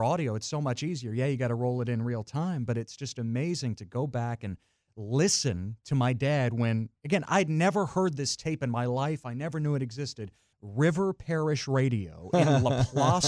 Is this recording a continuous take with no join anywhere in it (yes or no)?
no